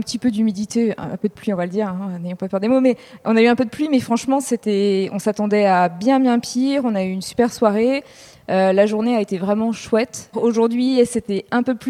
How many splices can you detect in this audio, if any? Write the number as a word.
one